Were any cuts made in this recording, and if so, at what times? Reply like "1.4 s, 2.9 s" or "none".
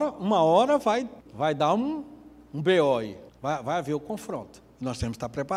1.2 s, 3.3 s